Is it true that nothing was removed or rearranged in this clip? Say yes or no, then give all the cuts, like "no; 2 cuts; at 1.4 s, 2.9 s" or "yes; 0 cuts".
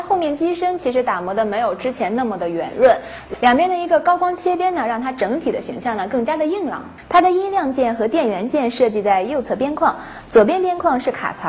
yes; 0 cuts